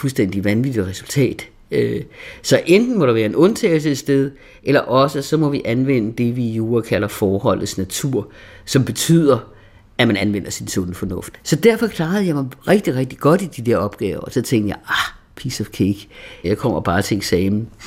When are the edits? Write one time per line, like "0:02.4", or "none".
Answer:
0:11.3
0:16.4